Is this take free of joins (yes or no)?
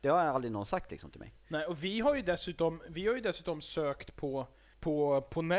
yes